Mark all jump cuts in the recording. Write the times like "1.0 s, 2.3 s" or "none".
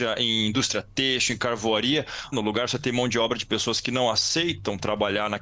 2.3 s